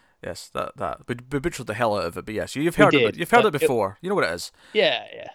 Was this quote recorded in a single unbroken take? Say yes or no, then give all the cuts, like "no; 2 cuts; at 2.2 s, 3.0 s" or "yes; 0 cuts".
yes; 0 cuts